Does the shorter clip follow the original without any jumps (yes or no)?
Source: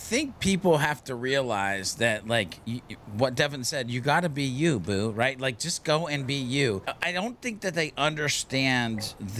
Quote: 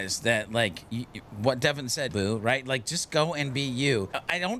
no